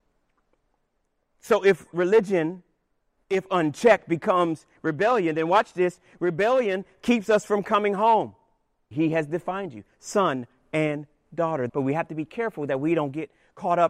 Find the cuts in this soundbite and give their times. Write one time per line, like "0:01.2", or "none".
0:08.9
0:11.7